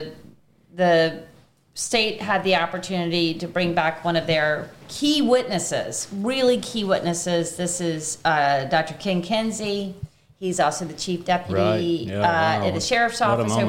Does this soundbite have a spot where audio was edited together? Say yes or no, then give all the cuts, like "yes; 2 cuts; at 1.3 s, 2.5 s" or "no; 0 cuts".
no; 0 cuts